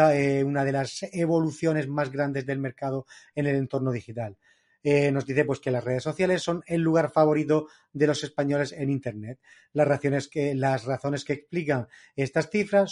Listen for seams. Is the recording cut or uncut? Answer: uncut